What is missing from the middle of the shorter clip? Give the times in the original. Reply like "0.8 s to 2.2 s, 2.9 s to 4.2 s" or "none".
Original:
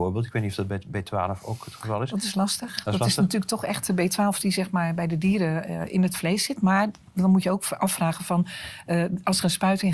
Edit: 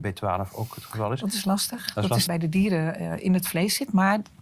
3.2 s to 5.0 s